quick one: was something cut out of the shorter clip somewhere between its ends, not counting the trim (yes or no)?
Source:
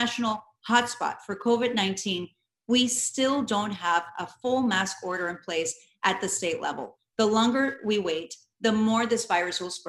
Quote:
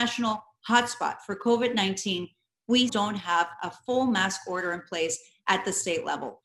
yes